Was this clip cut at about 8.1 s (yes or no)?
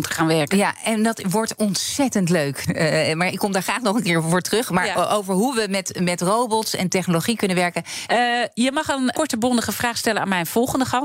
yes